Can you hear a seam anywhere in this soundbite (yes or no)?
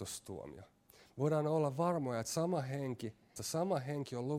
yes